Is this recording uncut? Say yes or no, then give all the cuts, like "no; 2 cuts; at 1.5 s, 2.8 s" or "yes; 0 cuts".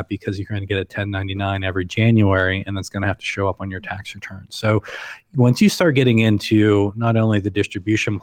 yes; 0 cuts